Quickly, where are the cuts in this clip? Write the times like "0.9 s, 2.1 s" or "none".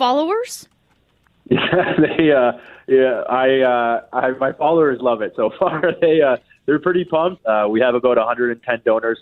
7.4 s